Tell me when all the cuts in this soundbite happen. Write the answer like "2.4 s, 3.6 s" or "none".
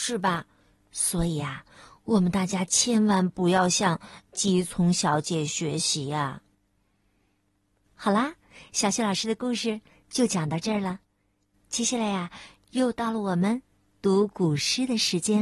4.7 s